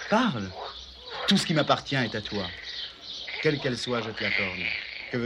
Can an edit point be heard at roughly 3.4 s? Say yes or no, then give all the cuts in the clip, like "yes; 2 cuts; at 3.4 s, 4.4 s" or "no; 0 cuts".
yes; 1 cut; at 3.4 s